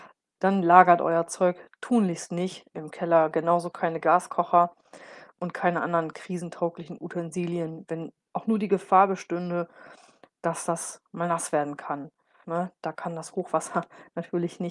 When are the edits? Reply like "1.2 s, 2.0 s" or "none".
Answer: 12.4 s